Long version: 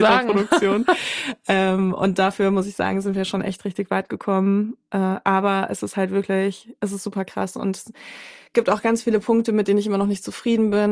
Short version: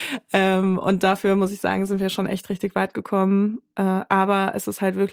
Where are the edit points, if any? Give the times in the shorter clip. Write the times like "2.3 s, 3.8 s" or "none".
none